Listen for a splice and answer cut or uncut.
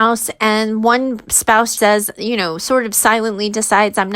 cut